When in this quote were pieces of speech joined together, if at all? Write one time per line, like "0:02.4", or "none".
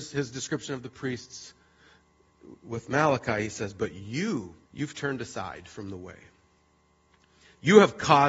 0:04.7